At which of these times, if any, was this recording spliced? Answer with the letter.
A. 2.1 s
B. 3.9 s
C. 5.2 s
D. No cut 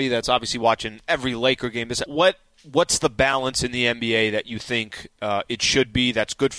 A